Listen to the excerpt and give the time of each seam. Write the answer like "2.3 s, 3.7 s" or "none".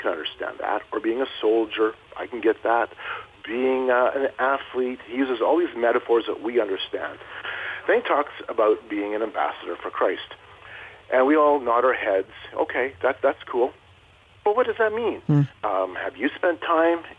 none